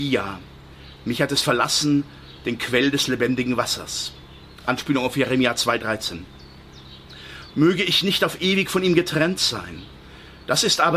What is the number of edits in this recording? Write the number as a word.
one